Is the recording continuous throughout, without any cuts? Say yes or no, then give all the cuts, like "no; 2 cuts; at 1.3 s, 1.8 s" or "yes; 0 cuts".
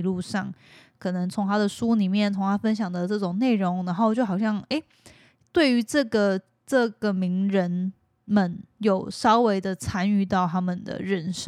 yes; 0 cuts